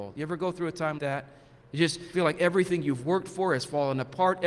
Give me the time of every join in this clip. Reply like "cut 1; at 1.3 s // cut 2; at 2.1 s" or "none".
cut 1; at 1.0 s // cut 2; at 2.1 s